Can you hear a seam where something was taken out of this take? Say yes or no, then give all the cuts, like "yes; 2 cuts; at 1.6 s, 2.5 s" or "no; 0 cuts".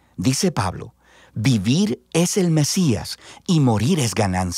no; 0 cuts